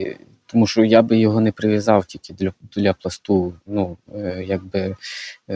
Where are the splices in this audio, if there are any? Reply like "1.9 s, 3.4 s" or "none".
none

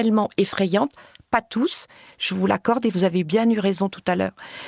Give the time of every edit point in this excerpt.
none

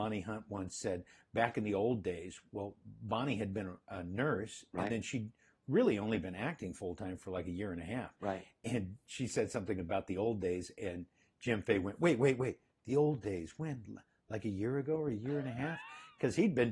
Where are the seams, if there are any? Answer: none

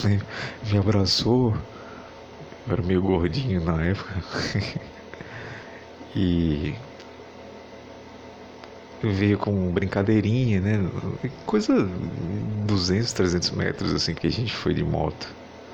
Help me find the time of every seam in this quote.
14.2 s

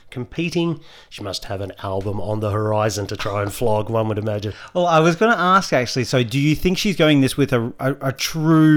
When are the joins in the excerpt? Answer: none

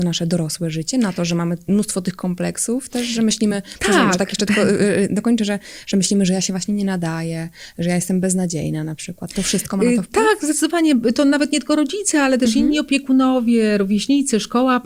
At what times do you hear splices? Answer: none

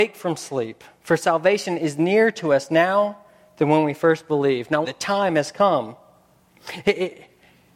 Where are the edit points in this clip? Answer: 4.8 s

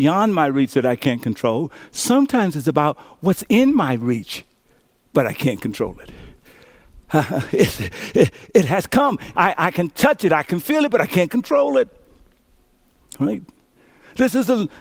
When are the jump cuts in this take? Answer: 9.3 s

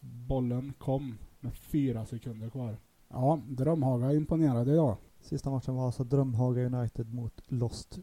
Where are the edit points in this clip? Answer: 3.0 s, 5.1 s

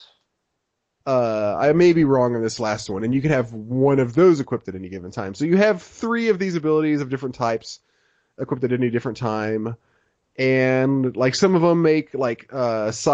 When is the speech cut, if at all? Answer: 1.0 s

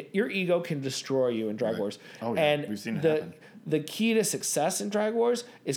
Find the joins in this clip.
none

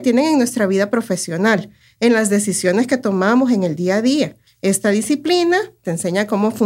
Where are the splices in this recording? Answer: 4.5 s

